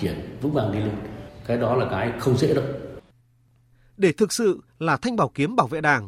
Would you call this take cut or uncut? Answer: uncut